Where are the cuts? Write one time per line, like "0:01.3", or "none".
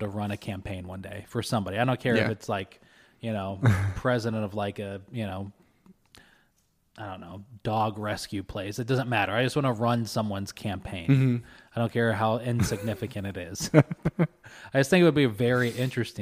none